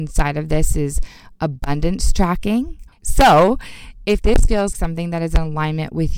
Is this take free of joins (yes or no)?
no